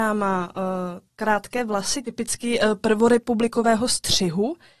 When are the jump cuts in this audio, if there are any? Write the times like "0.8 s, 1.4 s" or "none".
none